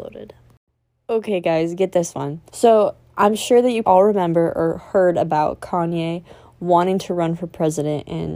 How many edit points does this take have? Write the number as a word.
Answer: two